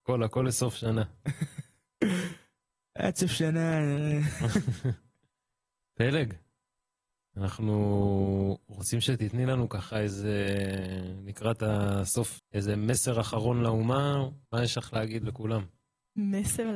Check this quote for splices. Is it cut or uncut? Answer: cut